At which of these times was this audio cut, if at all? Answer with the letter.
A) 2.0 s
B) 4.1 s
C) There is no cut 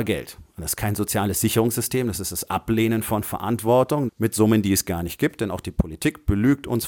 B